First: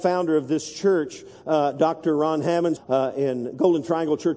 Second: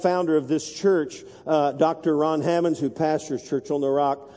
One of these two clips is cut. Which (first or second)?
first